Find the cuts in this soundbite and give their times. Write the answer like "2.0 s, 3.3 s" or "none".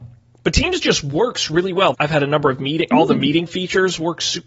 1.9 s